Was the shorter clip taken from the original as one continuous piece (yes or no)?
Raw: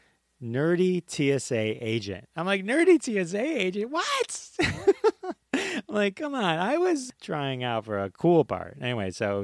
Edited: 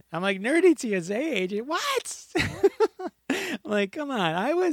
yes